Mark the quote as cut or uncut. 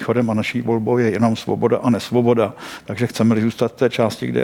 uncut